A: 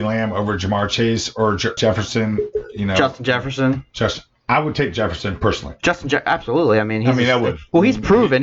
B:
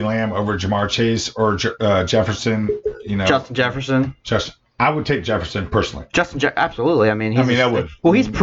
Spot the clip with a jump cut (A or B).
A